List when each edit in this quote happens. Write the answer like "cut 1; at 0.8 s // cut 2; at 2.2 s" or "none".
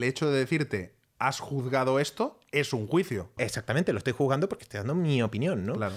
cut 1; at 3.4 s